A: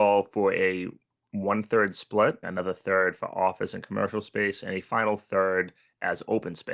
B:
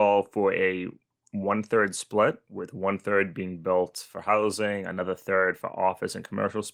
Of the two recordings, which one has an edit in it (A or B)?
A